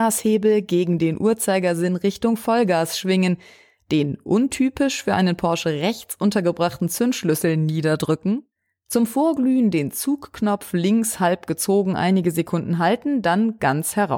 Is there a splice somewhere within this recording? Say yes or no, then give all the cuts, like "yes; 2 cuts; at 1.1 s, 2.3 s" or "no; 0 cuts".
no; 0 cuts